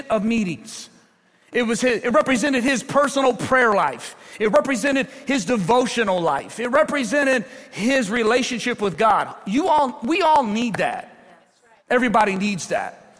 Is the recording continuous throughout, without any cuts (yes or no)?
no